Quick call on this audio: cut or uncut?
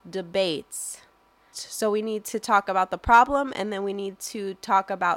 cut